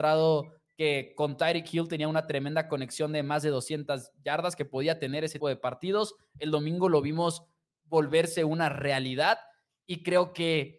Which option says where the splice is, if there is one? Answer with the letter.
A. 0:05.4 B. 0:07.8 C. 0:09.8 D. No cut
A